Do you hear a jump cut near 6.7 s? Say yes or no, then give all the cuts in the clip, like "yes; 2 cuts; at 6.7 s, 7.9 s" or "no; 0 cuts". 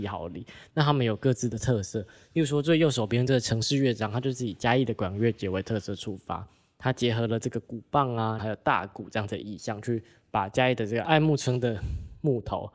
no; 1 cut; at 8.4 s